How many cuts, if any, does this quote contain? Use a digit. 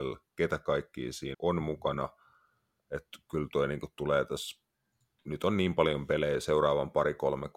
1